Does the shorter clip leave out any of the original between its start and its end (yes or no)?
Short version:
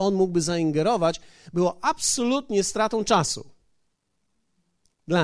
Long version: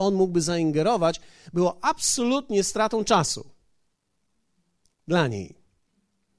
no